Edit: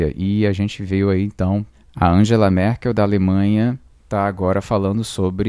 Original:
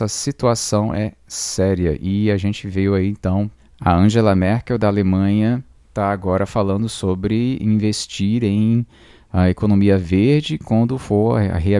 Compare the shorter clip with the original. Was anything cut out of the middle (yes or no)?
no